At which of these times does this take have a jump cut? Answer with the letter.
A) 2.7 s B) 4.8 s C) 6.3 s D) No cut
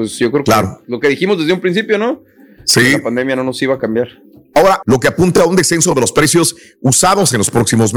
B